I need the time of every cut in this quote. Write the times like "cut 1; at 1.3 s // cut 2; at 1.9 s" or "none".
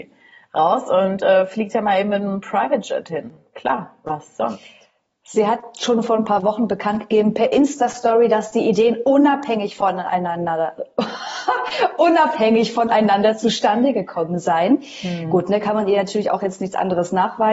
none